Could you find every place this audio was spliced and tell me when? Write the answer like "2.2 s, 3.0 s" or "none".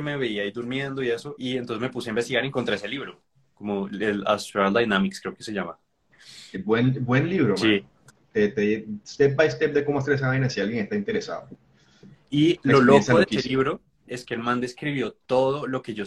none